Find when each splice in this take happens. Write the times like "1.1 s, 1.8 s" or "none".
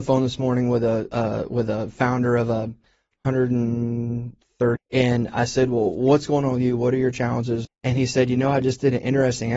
4.8 s, 7.6 s